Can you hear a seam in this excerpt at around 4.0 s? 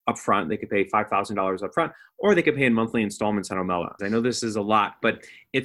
yes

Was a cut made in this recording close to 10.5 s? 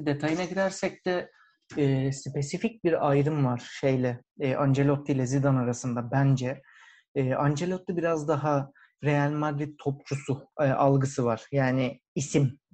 yes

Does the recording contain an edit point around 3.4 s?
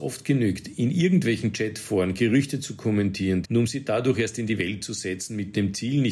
yes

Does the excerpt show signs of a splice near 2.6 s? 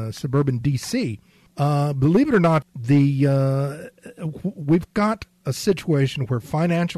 yes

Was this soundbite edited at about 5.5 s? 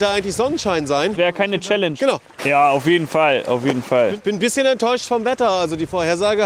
no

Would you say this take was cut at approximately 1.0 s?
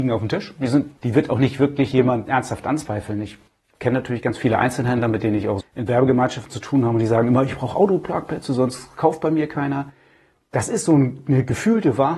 yes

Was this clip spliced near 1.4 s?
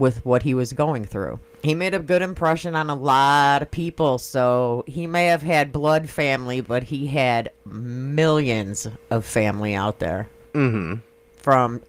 yes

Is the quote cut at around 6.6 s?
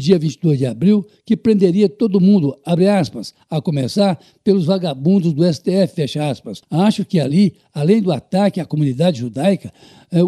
yes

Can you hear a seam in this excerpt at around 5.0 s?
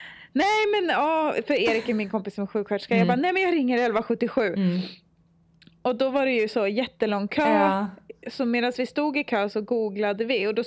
no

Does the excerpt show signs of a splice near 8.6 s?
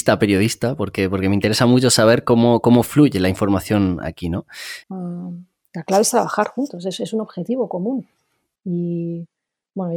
yes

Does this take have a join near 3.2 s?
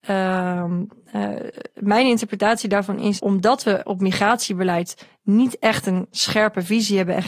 yes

